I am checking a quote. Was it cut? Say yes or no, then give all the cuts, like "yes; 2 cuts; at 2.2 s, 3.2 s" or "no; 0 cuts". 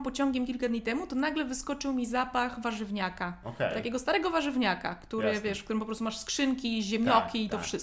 no; 0 cuts